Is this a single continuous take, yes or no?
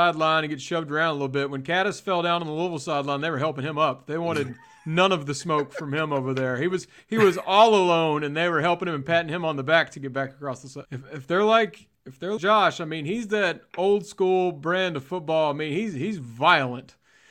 no